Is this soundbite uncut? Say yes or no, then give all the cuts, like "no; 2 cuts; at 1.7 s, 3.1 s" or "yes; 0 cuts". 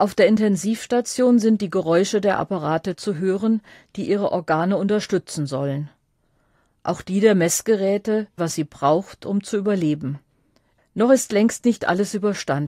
no; 2 cuts; at 8.4 s, 10.8 s